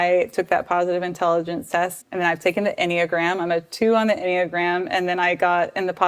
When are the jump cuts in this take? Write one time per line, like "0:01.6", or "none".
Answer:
0:02.0

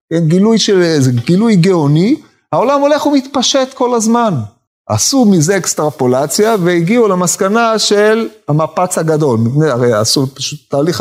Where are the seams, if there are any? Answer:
none

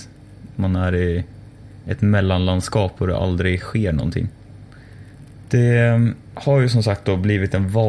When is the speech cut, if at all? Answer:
none

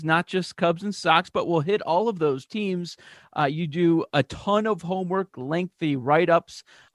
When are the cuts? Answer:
0:05.3

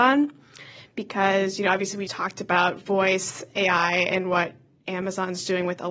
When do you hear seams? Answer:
0:02.1

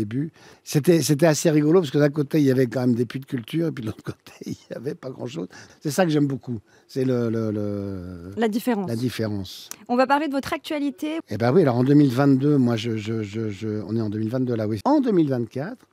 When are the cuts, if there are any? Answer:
0:11.2
0:14.8

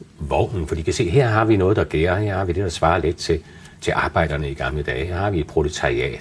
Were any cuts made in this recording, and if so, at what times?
none

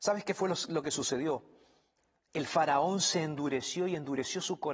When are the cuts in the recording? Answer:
none

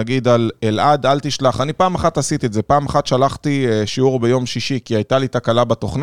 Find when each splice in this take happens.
none

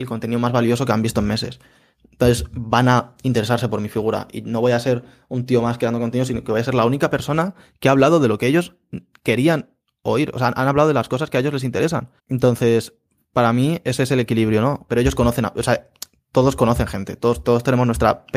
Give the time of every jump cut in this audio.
0:12.2
0:14.9

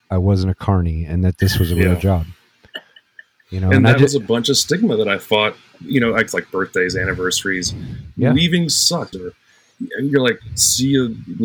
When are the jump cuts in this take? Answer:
0:06.3
0:09.1

